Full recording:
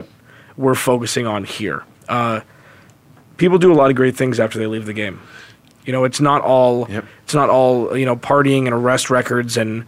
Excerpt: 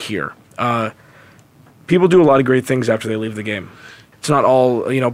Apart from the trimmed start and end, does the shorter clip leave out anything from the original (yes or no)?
yes